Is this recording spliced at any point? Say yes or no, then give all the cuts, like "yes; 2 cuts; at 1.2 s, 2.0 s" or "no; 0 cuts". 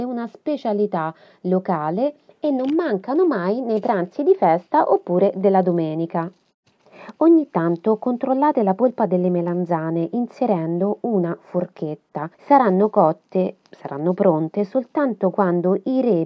yes; 2 cuts; at 12.3 s, 13.6 s